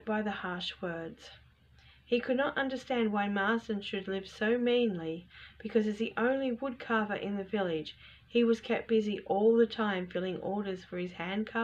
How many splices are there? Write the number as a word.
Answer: zero